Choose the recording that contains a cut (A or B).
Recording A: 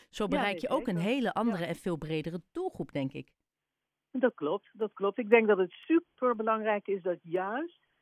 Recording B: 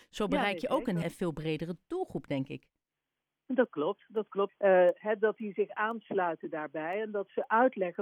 B